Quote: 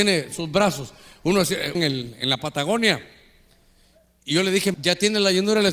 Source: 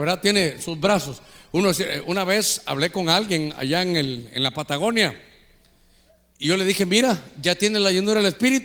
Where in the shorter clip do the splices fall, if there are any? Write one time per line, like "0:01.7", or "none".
0:01.7
0:04.7